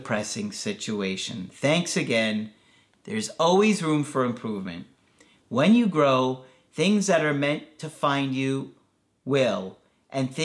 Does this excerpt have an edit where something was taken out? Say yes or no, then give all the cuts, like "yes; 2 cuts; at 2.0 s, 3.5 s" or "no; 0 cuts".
yes; 1 cut; at 2.9 s